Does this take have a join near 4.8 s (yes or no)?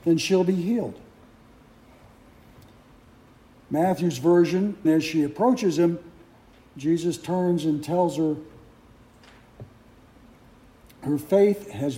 yes